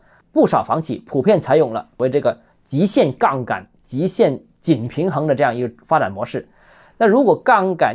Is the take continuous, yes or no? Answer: yes